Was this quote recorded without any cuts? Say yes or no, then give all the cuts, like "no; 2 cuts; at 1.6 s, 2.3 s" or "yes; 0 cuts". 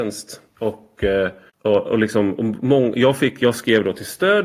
yes; 0 cuts